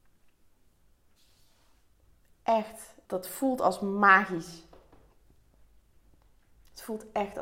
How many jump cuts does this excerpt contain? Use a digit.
1